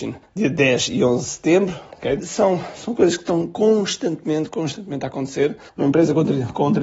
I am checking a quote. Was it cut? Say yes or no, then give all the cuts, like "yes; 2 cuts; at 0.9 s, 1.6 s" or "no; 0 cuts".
yes; 2 cuts; at 2.2 s, 5.7 s